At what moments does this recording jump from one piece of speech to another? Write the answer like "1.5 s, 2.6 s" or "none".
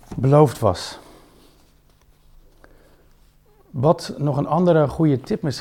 none